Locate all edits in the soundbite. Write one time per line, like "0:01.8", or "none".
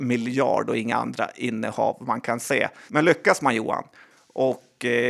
0:02.9